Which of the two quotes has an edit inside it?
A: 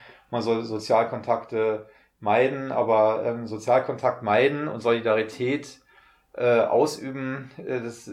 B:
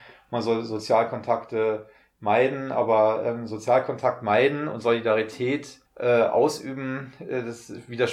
B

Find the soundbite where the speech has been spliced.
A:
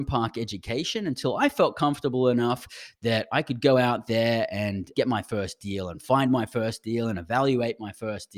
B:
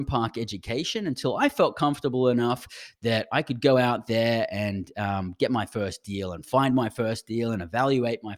A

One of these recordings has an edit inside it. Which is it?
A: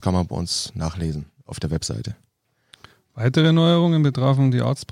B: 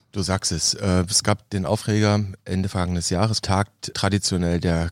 B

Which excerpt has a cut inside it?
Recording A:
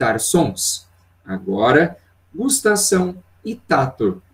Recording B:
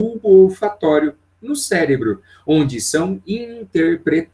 A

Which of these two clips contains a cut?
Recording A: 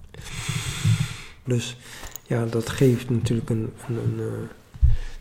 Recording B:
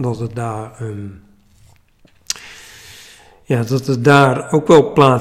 A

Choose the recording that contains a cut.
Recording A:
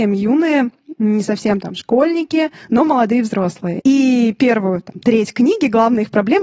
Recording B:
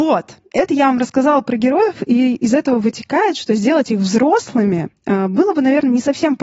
A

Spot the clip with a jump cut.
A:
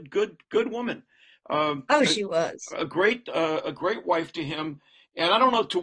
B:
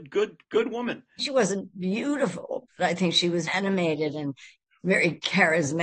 B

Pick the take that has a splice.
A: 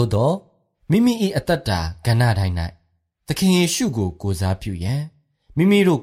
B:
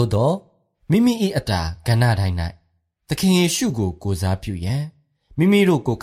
B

